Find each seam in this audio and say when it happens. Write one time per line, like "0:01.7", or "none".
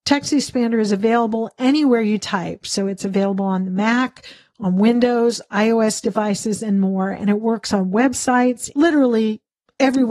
0:08.7